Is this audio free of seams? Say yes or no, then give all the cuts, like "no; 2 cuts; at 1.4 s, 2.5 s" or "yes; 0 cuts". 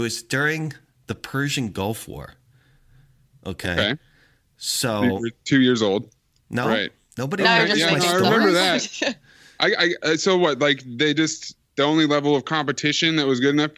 no; 2 cuts; at 6.3 s, 11.6 s